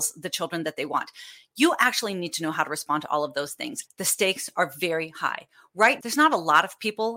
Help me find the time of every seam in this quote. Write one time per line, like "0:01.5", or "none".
0:03.8
0:06.0